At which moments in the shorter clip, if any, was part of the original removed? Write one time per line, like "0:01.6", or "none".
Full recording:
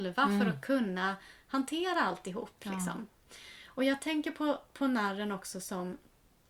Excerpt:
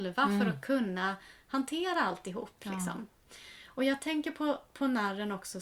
none